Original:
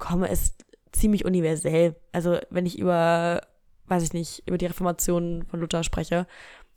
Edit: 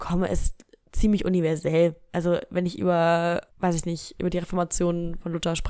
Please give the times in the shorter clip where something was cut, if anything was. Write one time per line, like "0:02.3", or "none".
0:03.5